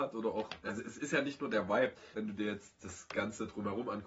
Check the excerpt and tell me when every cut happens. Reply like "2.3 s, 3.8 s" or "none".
2.1 s